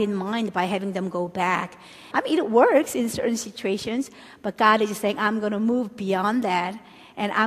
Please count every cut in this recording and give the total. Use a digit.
1